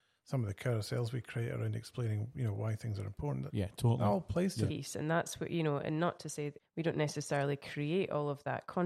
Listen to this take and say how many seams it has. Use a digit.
2